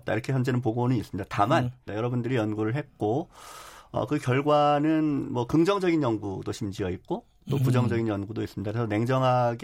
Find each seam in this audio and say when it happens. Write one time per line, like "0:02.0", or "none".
0:01.9